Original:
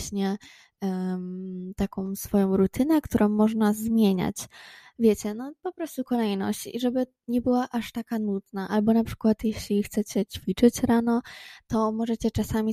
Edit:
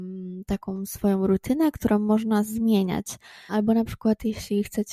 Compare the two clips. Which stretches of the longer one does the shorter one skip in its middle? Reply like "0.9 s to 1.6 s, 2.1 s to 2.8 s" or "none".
4.8 s to 8.7 s